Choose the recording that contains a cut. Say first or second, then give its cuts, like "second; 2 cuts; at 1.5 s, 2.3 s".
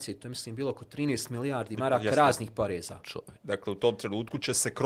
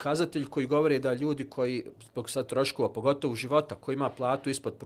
first; 1 cut; at 3.4 s